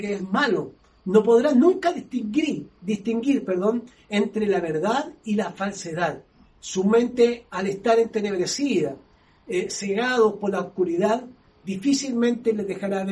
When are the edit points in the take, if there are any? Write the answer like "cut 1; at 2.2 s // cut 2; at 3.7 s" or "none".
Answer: cut 1; at 6.4 s